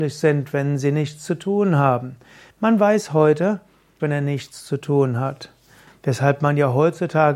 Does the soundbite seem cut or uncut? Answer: cut